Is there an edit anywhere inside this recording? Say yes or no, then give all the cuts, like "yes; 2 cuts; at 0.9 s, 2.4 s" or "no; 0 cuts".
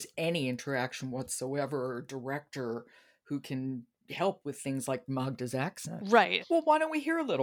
yes; 1 cut; at 6.4 s